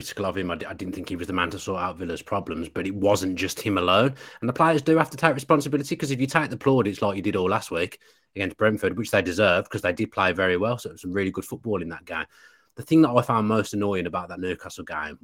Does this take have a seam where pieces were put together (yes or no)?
no